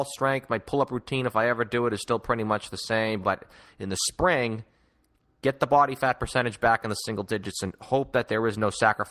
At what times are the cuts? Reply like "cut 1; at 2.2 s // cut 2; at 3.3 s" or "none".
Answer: cut 1; at 3.2 s